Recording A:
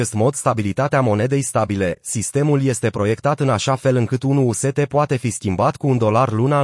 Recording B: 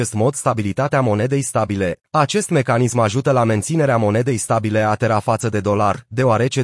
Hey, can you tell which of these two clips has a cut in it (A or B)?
B